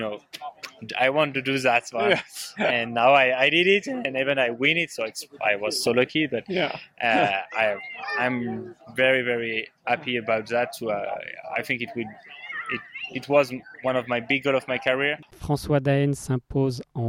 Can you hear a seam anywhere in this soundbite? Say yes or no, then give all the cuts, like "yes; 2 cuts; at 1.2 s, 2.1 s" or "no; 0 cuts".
no; 0 cuts